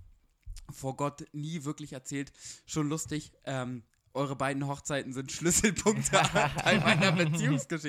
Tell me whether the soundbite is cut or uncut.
uncut